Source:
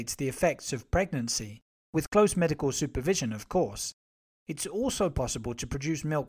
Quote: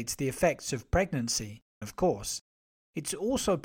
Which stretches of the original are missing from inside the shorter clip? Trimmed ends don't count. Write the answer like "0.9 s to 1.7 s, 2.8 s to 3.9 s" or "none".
1.8 s to 3.3 s